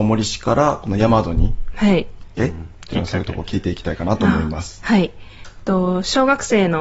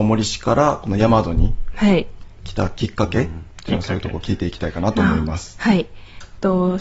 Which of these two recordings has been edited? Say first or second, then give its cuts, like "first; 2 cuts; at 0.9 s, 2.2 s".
first; 1 cut; at 2.4 s